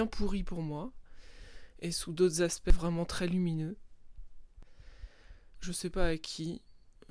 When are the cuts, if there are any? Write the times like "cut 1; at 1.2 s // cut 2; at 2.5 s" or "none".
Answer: cut 1; at 5.5 s